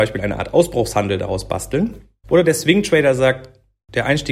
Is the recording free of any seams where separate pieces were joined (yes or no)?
no